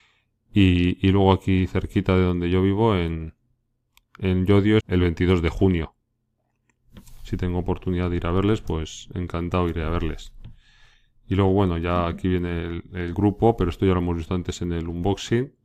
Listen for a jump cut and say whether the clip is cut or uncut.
cut